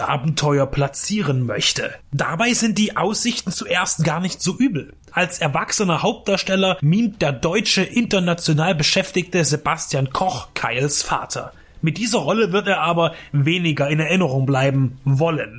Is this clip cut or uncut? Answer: cut